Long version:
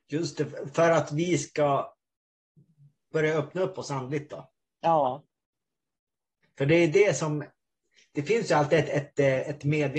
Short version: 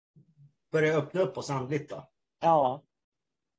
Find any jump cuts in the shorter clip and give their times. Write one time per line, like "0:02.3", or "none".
none